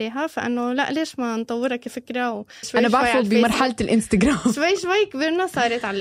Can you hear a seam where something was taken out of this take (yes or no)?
yes